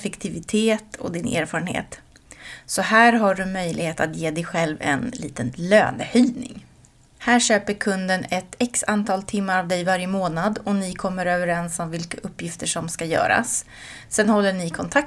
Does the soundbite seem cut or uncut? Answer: cut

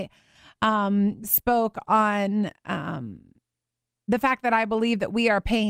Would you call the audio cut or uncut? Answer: cut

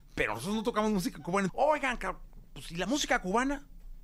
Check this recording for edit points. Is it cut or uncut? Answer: cut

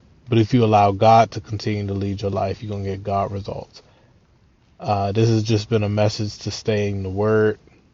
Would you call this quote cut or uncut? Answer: uncut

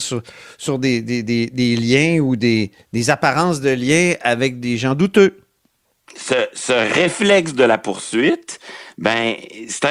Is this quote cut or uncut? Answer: uncut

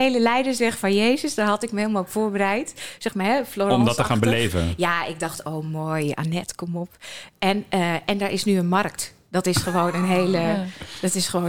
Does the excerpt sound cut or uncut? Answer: uncut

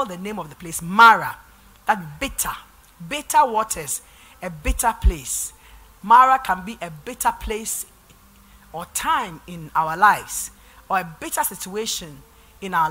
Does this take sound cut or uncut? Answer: uncut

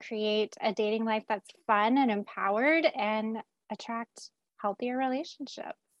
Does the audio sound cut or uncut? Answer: uncut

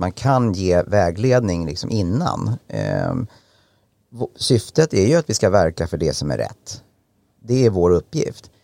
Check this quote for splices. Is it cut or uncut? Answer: uncut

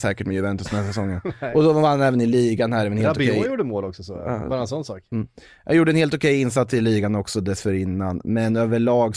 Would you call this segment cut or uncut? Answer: uncut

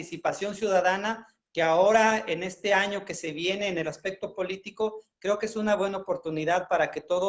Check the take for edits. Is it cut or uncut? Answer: uncut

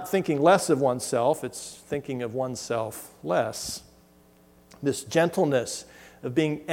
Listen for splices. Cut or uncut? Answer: uncut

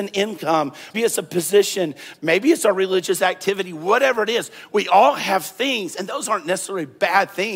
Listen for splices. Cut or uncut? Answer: cut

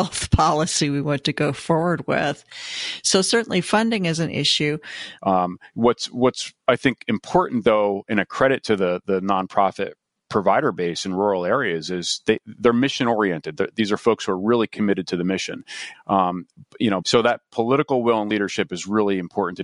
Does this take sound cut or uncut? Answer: cut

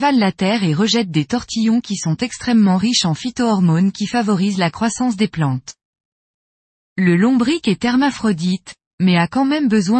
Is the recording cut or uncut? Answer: uncut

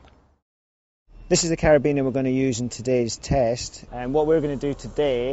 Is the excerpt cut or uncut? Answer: cut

